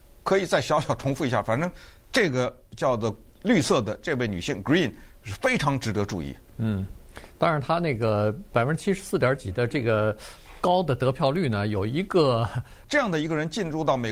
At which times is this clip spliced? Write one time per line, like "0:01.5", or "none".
0:12.8